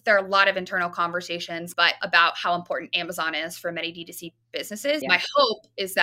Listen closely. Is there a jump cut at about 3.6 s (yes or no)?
no